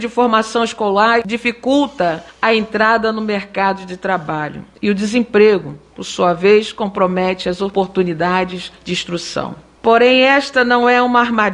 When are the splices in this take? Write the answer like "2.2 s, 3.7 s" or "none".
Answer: none